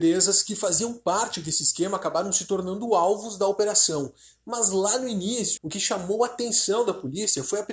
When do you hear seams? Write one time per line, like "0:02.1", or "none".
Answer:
0:05.6